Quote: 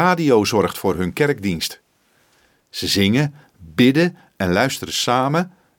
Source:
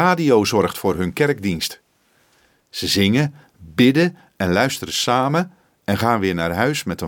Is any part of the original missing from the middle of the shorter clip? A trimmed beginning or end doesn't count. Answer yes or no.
no